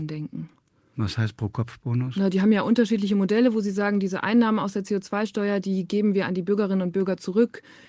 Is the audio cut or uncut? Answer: uncut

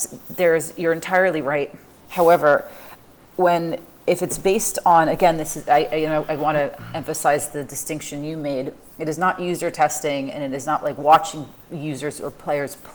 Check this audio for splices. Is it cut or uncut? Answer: cut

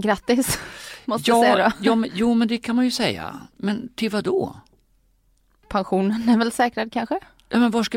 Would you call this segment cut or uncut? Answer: uncut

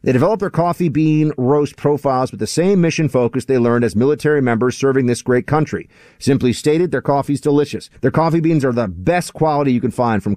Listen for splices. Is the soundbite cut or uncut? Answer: cut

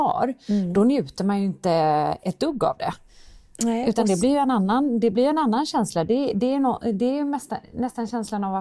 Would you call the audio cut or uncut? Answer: uncut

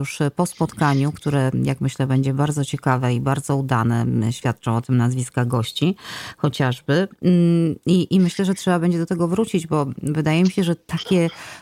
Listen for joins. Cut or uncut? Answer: uncut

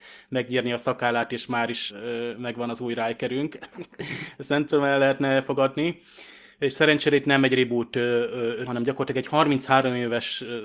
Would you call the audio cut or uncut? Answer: cut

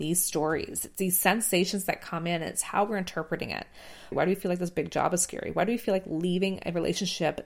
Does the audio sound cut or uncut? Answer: cut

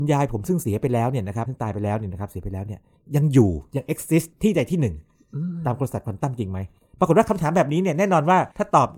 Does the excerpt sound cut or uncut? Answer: uncut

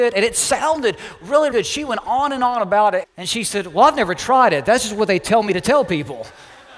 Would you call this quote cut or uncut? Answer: cut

